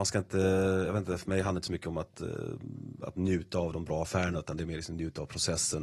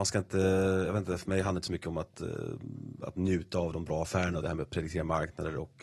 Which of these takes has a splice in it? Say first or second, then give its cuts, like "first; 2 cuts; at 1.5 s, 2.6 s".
second; 1 cut; at 4.4 s